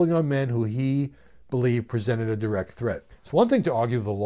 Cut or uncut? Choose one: cut